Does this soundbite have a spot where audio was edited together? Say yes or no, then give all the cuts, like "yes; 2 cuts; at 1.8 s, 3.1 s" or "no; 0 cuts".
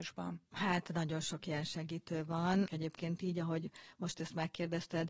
yes; 1 cut; at 2.7 s